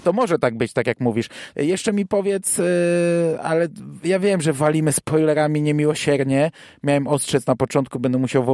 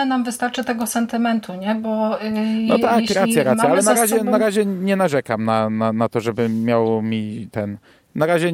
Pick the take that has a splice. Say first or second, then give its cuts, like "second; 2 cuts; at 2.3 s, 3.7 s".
first; 1 cut; at 1.5 s